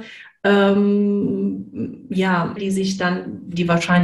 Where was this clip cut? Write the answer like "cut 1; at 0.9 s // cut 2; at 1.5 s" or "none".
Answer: cut 1; at 2.6 s